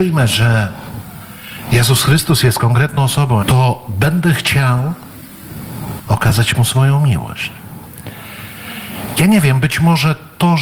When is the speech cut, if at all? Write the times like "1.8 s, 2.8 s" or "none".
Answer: 3.4 s, 6.0 s

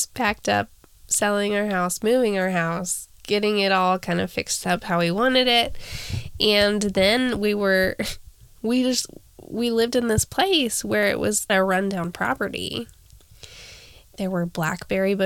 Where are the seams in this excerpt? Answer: 11.5 s

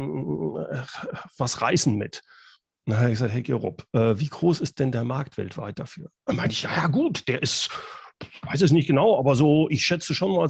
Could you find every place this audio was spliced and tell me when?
none

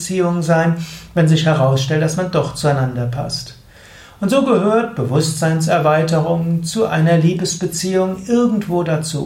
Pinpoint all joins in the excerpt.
none

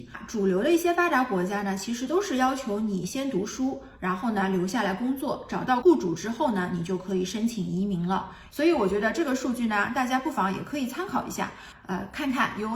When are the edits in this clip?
5.8 s, 8.5 s

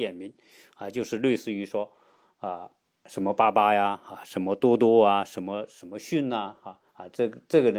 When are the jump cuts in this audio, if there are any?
6.9 s

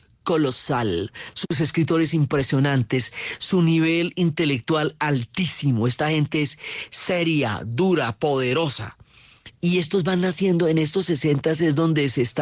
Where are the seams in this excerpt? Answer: none

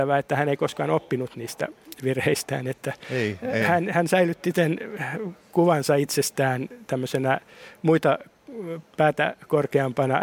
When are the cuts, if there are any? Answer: none

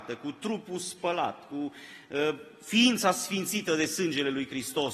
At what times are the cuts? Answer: none

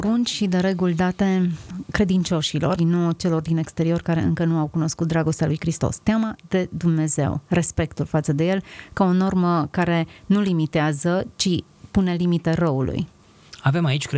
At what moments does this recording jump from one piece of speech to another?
2.8 s

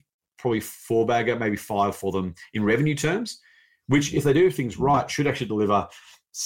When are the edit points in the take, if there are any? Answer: none

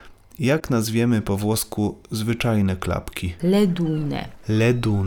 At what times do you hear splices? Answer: 3.4 s

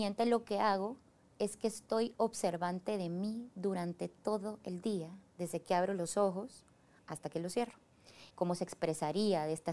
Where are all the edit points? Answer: 8.3 s

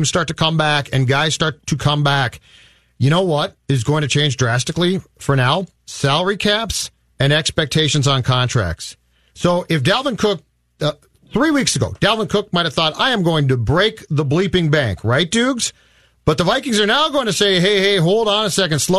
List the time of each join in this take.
none

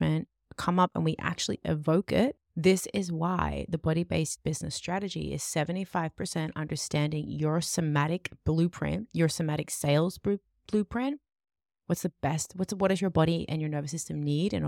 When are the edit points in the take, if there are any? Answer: 2.4 s

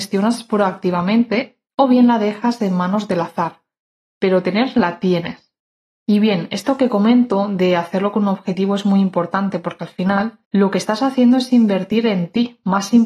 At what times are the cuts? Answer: 10.4 s

